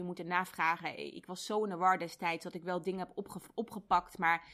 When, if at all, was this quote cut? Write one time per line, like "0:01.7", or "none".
none